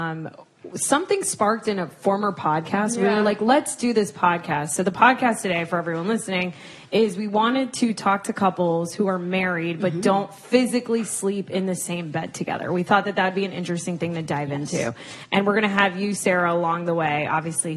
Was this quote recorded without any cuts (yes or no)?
yes